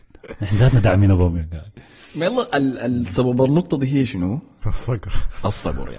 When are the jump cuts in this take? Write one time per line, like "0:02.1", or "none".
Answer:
0:04.6